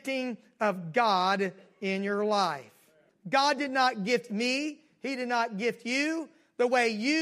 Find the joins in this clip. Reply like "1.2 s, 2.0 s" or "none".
3.1 s